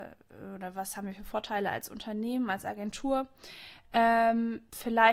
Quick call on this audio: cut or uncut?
uncut